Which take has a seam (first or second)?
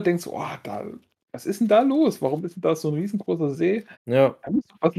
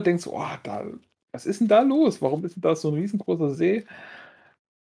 first